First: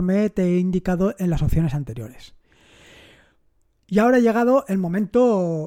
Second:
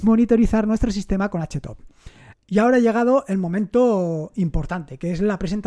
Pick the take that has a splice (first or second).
second